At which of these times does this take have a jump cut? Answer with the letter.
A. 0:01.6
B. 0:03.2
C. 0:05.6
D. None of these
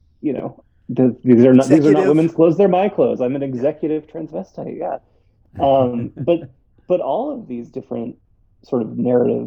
D